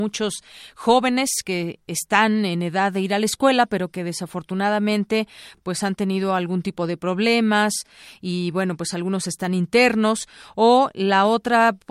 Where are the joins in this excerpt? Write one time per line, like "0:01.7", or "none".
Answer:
none